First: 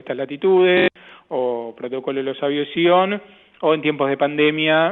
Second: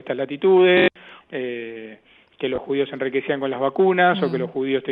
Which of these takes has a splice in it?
second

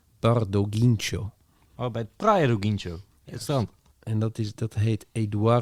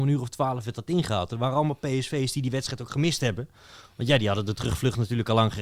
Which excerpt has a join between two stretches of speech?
first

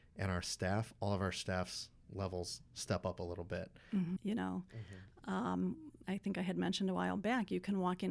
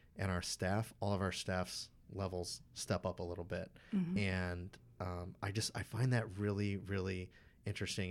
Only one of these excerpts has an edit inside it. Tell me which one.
first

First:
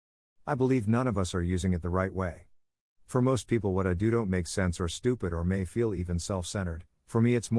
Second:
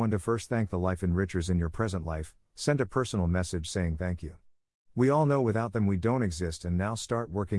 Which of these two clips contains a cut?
first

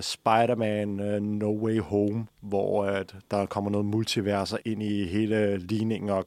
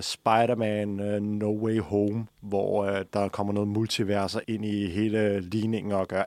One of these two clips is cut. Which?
second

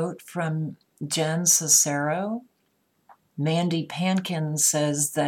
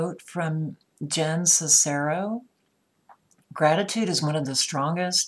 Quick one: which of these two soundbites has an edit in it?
first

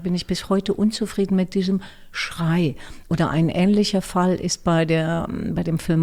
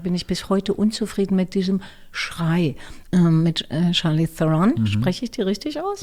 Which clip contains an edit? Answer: second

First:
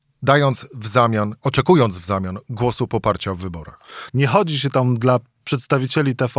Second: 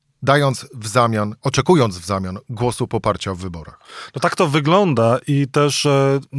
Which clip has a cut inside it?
first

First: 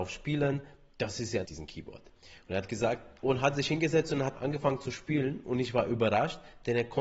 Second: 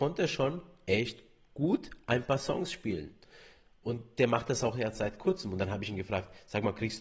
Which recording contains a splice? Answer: first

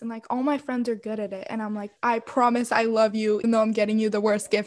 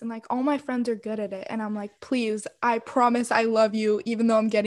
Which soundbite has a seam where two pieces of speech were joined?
first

